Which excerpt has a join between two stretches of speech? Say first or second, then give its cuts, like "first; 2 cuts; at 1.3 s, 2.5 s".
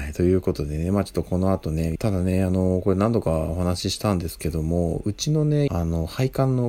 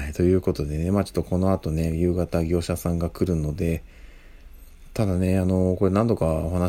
first; 2 cuts; at 2.0 s, 5.7 s